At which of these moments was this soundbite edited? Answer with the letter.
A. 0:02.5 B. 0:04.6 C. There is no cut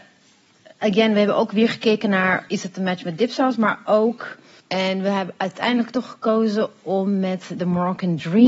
B